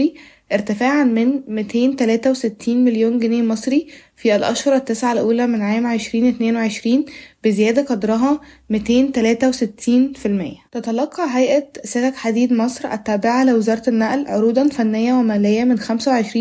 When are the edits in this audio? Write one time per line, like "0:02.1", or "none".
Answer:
0:10.7